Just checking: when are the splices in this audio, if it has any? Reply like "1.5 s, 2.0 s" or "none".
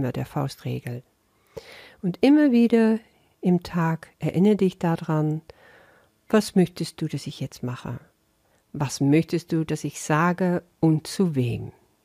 8.5 s